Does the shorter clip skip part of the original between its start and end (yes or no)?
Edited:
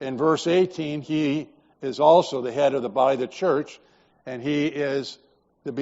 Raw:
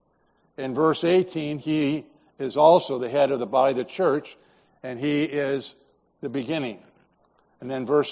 no